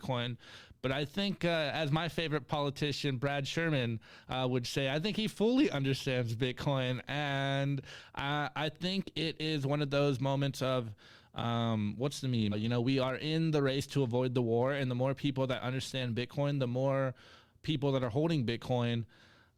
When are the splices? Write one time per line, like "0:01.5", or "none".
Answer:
0:12.5